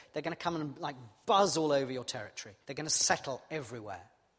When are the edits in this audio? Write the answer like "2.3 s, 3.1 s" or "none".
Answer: 2.6 s